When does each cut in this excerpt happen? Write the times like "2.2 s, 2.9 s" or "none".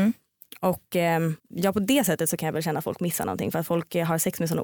1.4 s